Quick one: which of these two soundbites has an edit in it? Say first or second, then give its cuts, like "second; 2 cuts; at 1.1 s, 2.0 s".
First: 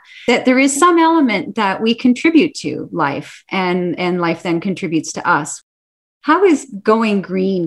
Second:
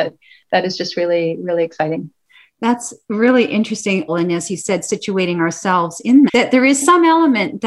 second; 2 cuts; at 4.1 s, 6.3 s